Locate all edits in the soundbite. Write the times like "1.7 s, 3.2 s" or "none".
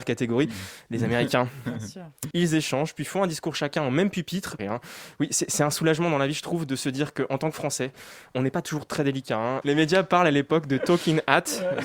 2.3 s, 4.6 s, 9.6 s